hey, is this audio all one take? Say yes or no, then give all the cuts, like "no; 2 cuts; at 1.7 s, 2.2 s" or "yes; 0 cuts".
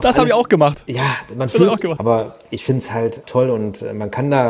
no; 2 cuts; at 2.0 s, 3.2 s